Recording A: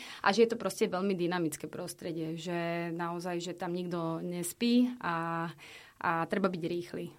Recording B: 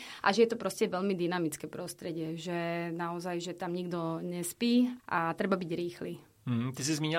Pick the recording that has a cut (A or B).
B